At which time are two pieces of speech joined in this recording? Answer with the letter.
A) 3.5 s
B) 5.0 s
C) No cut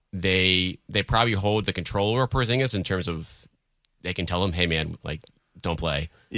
B